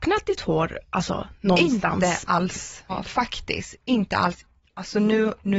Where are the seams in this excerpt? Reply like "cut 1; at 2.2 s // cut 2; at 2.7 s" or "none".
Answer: cut 1; at 2.9 s